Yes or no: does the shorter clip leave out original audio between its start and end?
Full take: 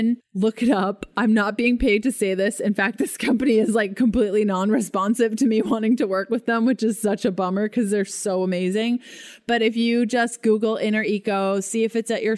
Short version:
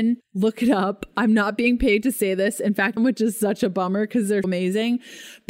yes